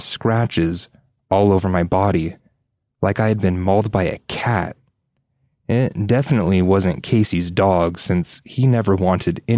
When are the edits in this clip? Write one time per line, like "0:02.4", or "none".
none